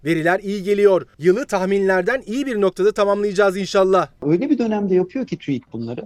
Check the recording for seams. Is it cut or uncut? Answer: uncut